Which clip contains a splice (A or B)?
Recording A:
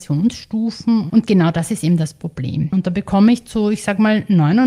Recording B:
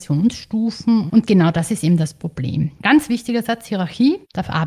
A